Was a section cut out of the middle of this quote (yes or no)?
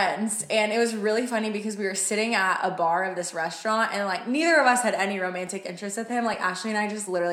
no